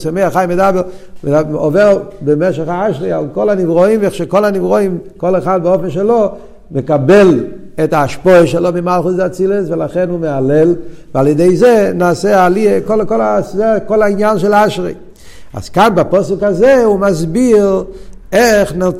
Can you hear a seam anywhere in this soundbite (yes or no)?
no